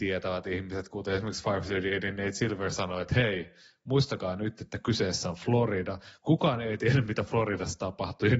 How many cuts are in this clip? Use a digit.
0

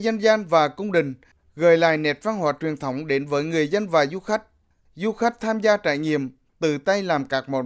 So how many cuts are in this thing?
1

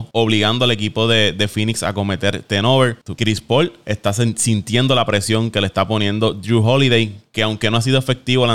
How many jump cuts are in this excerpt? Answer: 1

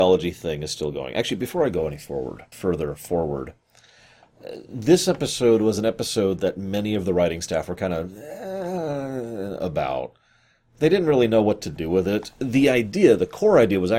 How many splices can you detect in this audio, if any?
1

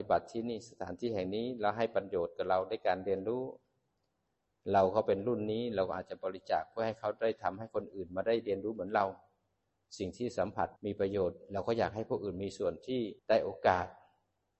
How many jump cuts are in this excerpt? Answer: 2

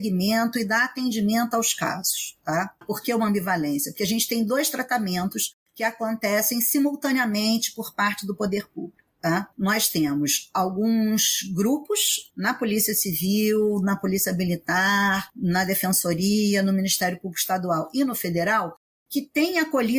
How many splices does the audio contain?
2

